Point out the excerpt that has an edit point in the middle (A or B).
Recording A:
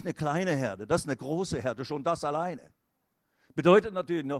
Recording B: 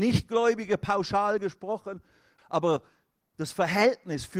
B